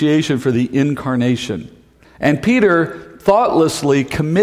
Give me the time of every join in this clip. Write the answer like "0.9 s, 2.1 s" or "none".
2.0 s